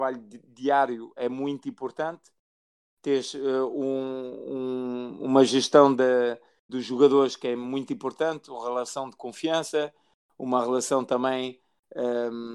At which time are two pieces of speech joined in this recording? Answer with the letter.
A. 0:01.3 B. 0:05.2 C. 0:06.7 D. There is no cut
C